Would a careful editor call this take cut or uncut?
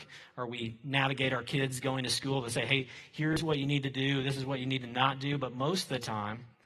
uncut